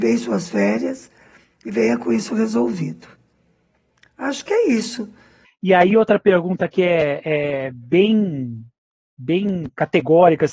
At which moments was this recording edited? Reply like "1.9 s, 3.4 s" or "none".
5.4 s